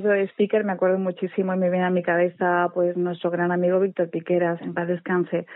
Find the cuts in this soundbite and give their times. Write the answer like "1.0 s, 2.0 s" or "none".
4.6 s